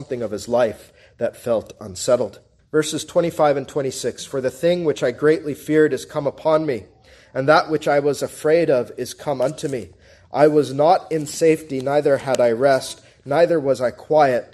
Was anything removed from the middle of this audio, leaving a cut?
yes; 1 cut; at 2.6 s

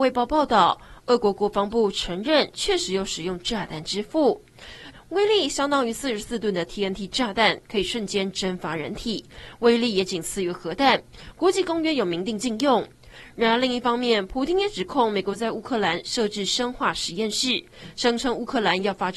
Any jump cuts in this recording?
yes; 1 cut; at 4.9 s

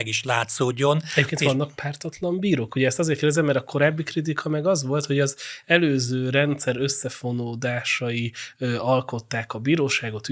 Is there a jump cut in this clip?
no; 0 cuts

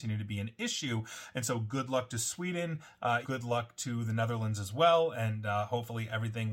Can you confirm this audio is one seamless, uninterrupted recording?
no; 1 cut; at 3.2 s

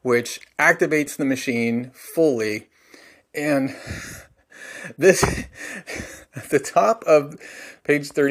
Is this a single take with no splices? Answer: yes; 0 cuts

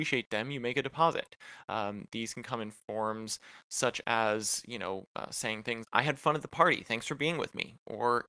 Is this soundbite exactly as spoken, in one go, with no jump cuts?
no; 1 cut; at 5.8 s

